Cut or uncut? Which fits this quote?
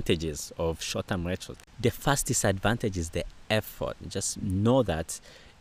cut